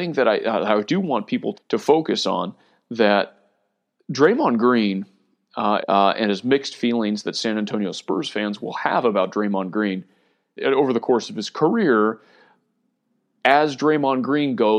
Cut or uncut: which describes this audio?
cut